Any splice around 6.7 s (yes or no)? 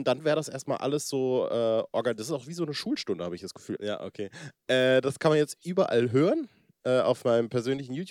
no